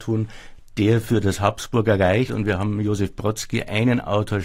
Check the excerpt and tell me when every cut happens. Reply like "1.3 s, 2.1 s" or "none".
2.3 s

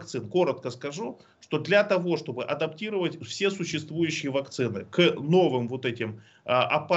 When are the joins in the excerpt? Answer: none

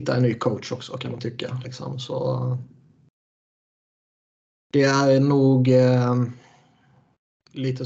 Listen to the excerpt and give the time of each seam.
1.6 s

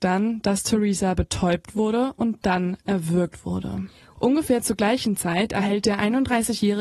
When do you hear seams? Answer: 4.2 s

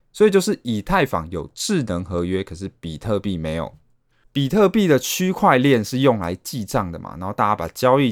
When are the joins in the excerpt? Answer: none

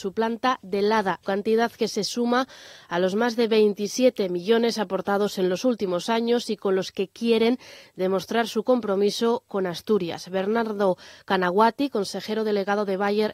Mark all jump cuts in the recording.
1.2 s

